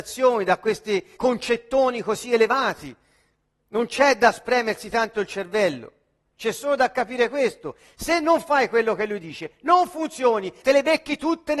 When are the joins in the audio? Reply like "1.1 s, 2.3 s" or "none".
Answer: 1.2 s, 7.9 s, 10.6 s